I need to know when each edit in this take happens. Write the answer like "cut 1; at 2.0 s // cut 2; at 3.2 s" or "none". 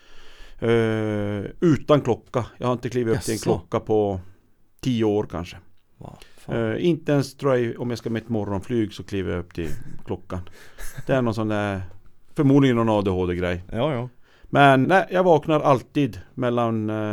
cut 1; at 14.8 s